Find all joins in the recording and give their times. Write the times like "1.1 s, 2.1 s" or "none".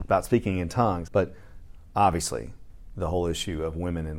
1.1 s